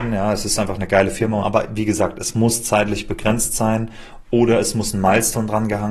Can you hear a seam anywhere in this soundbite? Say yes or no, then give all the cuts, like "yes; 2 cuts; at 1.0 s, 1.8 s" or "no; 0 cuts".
yes; 1 cut; at 1.4 s